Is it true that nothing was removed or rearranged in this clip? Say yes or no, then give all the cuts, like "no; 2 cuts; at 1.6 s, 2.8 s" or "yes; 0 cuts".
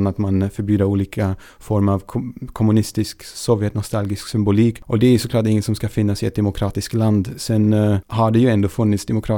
yes; 0 cuts